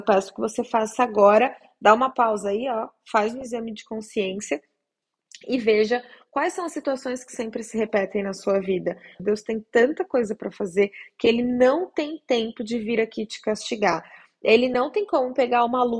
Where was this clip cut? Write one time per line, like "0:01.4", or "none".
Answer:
0:09.2